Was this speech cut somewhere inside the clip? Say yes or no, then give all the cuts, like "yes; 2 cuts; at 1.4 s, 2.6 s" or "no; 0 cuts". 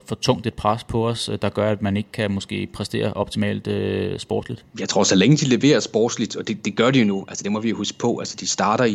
yes; 1 cut; at 4.7 s